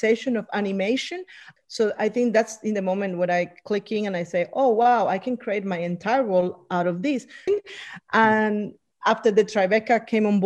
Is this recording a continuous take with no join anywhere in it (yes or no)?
no